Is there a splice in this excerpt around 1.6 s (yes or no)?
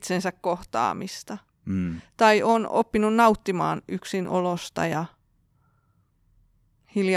no